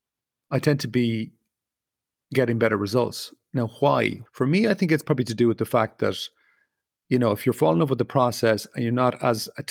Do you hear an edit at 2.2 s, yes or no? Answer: no